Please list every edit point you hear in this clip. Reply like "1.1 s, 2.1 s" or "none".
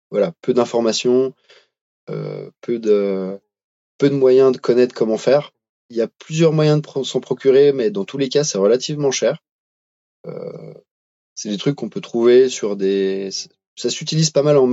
5.7 s